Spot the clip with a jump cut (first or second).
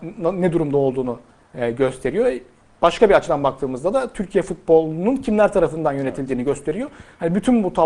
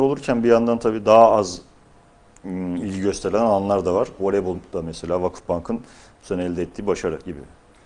second